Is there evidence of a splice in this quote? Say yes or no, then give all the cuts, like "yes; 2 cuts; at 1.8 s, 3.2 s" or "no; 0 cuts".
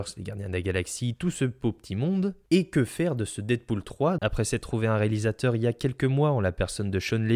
yes; 1 cut; at 4.2 s